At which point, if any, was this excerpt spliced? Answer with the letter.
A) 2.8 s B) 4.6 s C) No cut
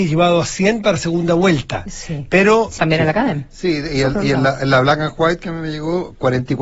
A